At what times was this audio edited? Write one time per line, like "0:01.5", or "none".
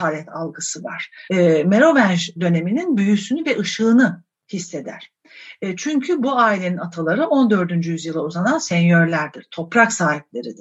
0:01.3